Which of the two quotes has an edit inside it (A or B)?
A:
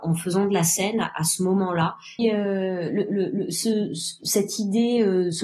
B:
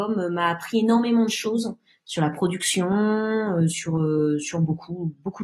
A